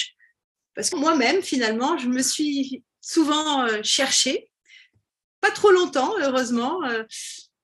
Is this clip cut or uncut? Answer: cut